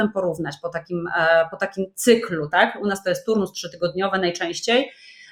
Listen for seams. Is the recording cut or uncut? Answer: uncut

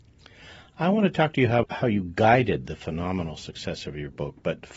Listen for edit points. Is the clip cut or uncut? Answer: cut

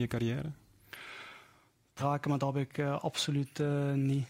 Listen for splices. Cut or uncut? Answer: cut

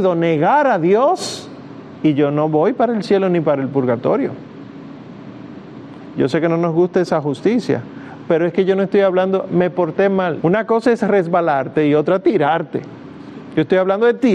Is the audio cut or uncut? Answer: cut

